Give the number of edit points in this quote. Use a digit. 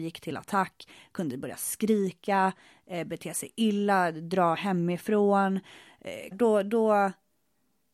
1